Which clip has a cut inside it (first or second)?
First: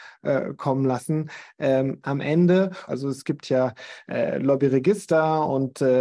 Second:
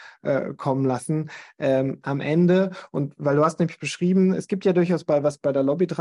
first